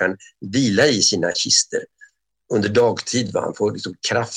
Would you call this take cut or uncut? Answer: uncut